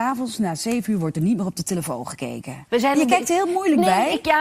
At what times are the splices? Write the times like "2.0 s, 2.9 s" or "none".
2.7 s